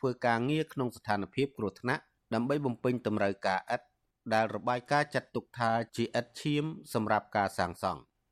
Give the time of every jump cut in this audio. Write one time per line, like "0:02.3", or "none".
none